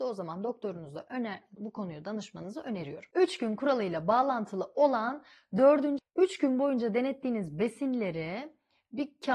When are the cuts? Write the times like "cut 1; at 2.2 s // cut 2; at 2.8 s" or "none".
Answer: cut 1; at 1.6 s // cut 2; at 6.0 s